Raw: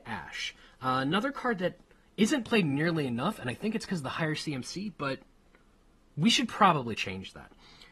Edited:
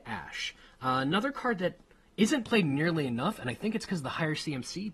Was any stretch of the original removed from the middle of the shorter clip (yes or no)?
no